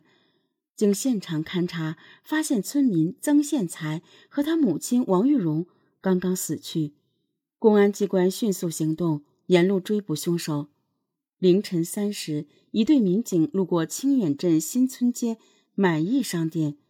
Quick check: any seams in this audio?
no; 0 cuts

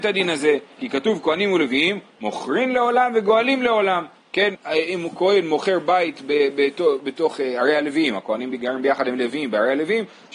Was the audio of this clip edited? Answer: yes; 1 cut; at 4.5 s

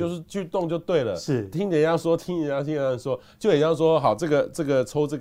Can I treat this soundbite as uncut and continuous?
yes; 0 cuts

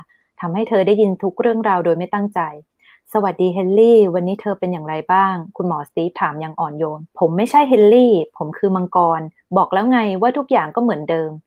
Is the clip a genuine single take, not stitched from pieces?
no; 1 cut; at 7.1 s

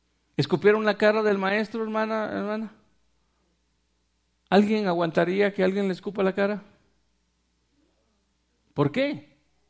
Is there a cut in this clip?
no; 0 cuts

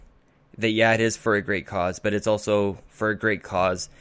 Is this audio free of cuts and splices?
yes; 0 cuts

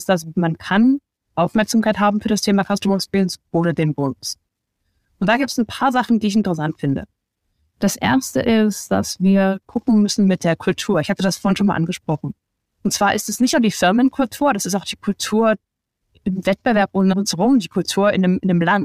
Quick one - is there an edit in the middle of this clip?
yes; 1 cut; at 17.1 s

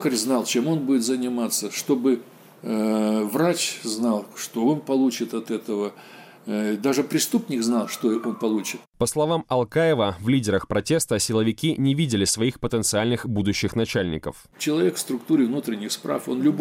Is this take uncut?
yes; 0 cuts

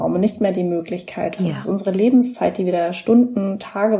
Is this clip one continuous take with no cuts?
no; 1 cut; at 1.4 s

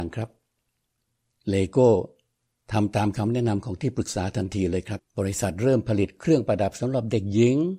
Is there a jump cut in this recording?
yes; 1 cut; at 5.0 s

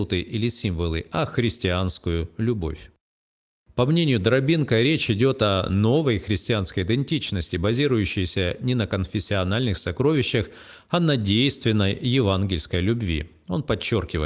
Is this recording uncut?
yes; 0 cuts

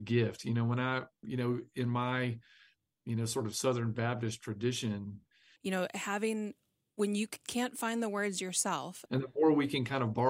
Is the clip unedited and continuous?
no; 3 cuts; at 1.2 s, 5.6 s, 9.1 s

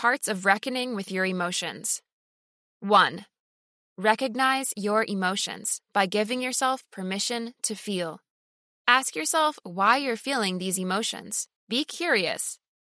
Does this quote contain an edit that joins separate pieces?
yes; 2 cuts; at 8.8 s, 11.6 s

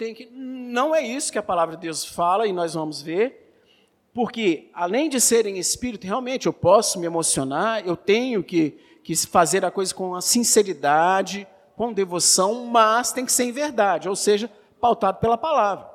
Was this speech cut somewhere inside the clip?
no; 0 cuts

